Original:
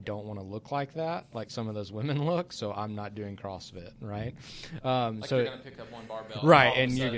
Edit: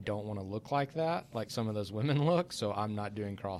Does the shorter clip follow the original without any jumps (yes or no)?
yes